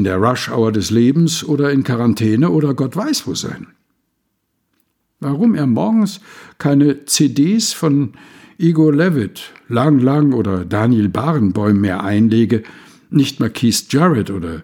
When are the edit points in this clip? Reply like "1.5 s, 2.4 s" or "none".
none